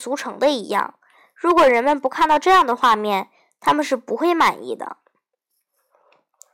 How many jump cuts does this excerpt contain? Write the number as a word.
zero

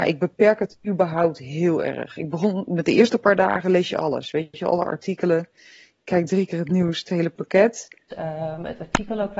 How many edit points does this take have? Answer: one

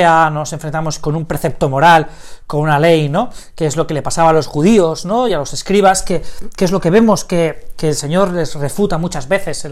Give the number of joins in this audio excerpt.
zero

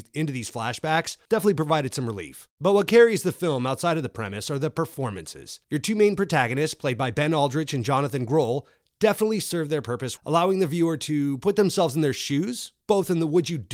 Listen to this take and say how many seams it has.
two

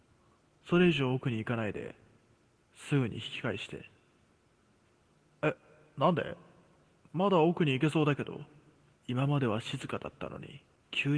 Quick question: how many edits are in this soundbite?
one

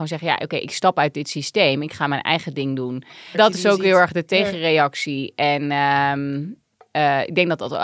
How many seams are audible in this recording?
one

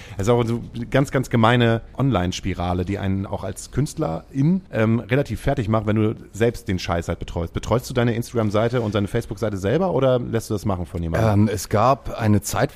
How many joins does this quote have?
one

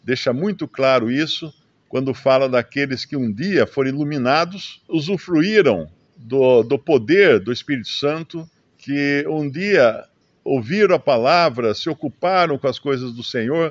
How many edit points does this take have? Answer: one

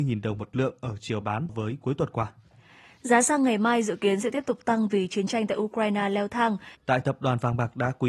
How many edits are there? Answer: two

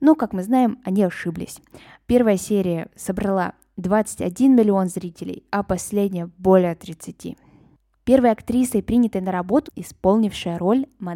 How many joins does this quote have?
one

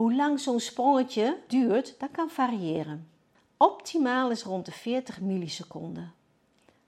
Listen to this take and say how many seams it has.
one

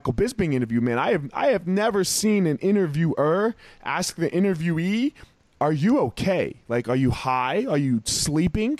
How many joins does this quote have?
zero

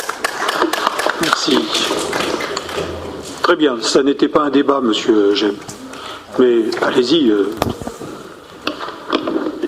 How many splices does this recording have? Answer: zero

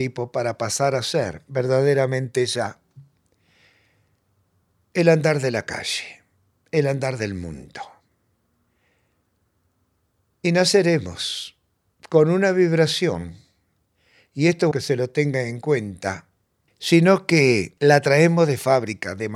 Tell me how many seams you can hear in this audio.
three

